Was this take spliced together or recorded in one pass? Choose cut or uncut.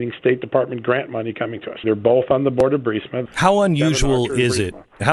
cut